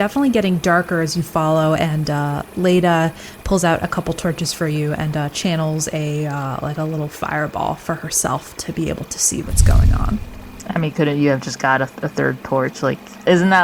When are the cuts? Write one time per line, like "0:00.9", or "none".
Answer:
none